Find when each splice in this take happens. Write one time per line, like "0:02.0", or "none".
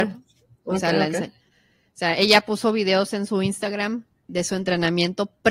0:04.3